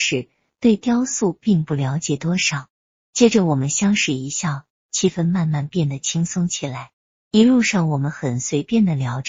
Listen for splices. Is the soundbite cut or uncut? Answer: uncut